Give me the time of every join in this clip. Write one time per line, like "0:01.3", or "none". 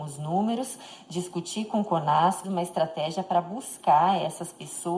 0:02.4